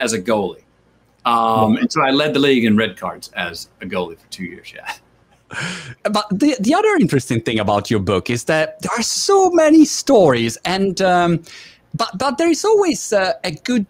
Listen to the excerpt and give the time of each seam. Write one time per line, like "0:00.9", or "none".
0:06.0